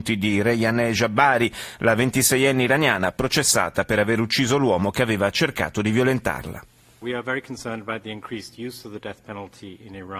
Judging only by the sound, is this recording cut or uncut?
uncut